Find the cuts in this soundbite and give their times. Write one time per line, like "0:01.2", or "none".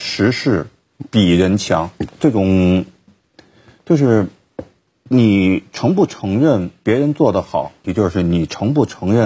0:02.1
0:07.8